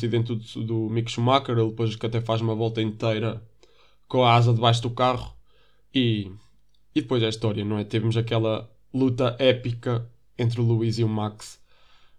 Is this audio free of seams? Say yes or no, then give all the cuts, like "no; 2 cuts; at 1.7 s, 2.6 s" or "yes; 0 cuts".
yes; 0 cuts